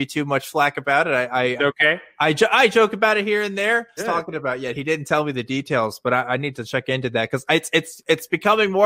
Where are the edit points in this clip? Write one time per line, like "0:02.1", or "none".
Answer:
0:01.6
0:04.0